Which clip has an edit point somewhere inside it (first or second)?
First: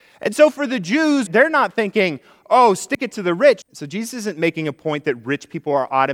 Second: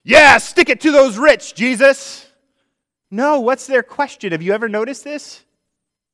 first